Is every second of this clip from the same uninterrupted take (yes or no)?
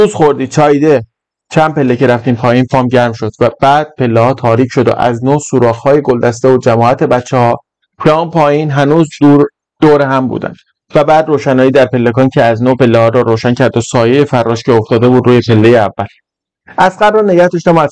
yes